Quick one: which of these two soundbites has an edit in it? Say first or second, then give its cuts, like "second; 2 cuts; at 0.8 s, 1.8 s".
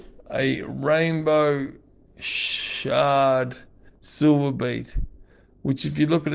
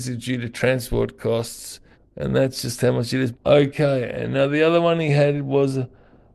second; 2 cuts; at 1.9 s, 3.3 s